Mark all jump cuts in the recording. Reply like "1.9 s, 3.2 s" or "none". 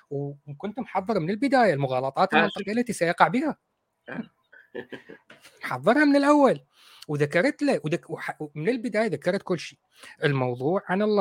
none

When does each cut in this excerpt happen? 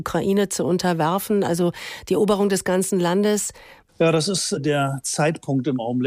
3.9 s

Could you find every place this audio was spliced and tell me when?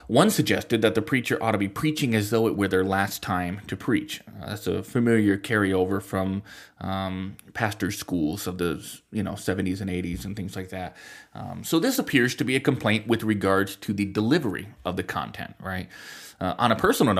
none

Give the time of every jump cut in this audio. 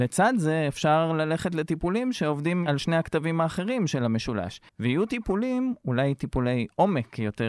4.7 s

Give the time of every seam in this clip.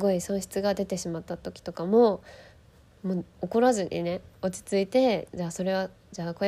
none

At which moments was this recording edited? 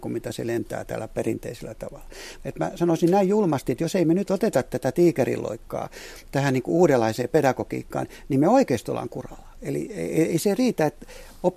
2.4 s

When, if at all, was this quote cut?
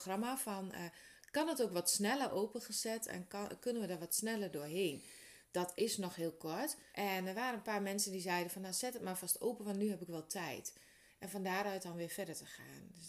5.4 s, 6.9 s, 11.1 s

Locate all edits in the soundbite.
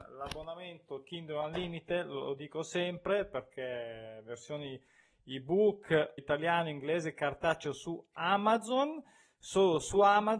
6.2 s

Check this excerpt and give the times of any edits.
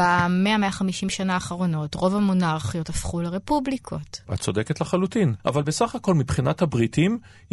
5.4 s

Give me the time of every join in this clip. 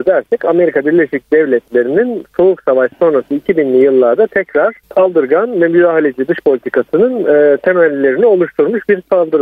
4.8 s

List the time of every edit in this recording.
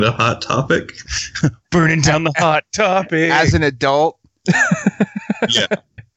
1.1 s

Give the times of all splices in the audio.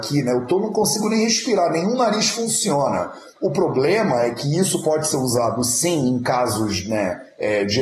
3.4 s

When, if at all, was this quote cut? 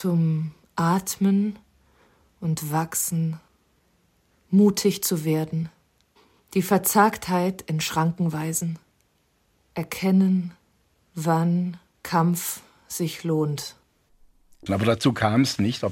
4.3 s, 14.7 s

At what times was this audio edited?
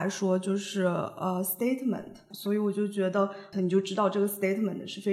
2.3 s, 3.5 s

